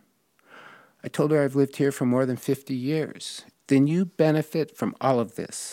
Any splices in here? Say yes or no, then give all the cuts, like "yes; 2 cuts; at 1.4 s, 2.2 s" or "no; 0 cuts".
yes; 1 cut; at 3.5 s